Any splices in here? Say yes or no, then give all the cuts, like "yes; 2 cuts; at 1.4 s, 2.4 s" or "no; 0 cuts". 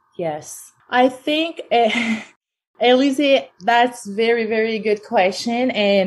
no; 0 cuts